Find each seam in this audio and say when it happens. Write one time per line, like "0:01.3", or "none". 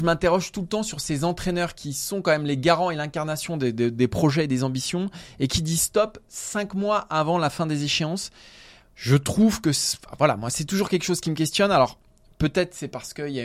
none